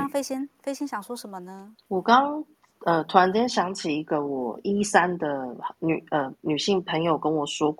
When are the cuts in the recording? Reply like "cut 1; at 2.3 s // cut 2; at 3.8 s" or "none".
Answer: none

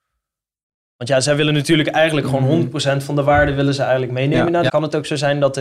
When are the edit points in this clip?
cut 1; at 4.7 s

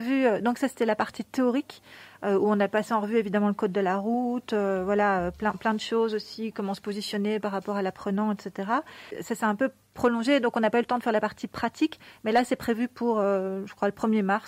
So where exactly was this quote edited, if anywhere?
none

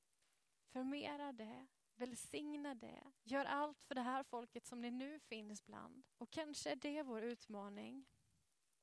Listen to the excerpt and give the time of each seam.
cut 1; at 6.1 s

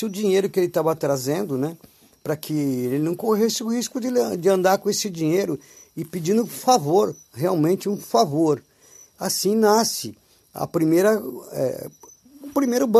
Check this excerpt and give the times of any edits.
cut 1; at 11.4 s

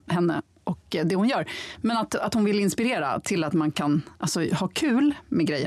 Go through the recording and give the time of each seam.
none

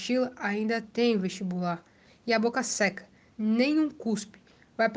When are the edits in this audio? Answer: cut 1; at 3.3 s

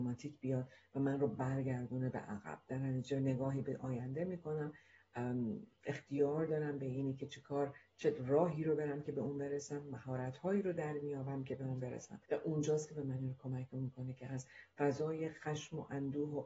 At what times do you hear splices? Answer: cut 1; at 12.2 s

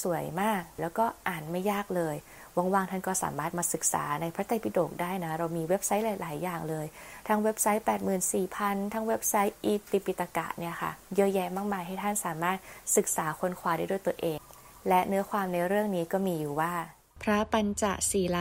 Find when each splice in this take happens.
cut 1; at 11.0 s

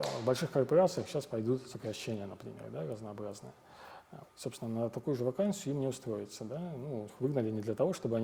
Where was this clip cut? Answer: cut 1; at 4.3 s // cut 2; at 7.1 s

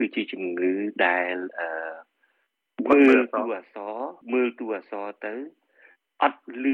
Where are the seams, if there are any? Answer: cut 1; at 4.2 s

